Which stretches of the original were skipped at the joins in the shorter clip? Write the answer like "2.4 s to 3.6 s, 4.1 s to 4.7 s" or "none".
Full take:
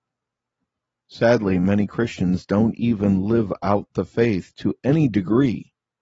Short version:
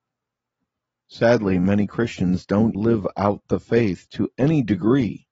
2.7 s to 3.2 s